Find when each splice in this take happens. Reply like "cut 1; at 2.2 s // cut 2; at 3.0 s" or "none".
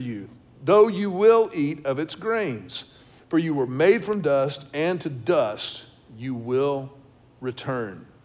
cut 1; at 3.2 s